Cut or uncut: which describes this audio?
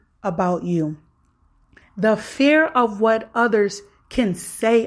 cut